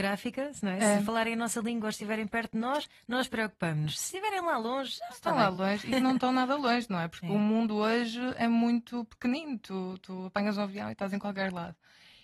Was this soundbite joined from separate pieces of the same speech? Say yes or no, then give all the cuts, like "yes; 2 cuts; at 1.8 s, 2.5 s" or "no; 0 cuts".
no; 0 cuts